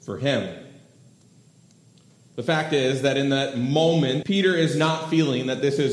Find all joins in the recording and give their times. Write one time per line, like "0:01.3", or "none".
0:04.2